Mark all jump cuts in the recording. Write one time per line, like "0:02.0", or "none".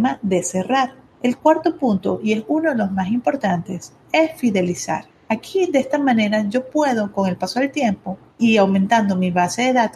0:01.4

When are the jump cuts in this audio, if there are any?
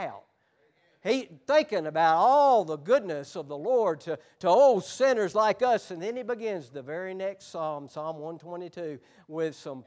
none

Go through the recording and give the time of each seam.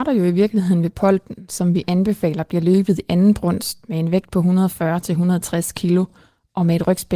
none

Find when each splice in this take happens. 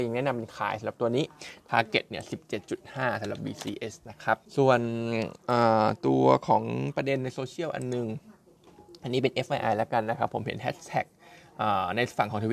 0:04.5

